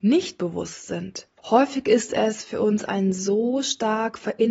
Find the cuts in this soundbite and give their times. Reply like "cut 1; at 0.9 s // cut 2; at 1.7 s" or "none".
cut 1; at 1.4 s